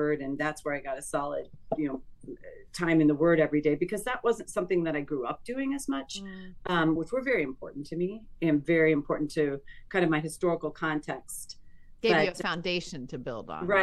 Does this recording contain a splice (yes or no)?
yes